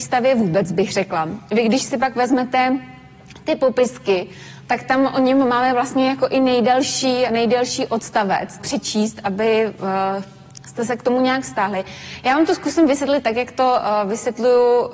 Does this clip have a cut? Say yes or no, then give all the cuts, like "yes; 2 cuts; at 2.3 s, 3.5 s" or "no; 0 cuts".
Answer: yes; 2 cuts; at 7.3 s, 8.6 s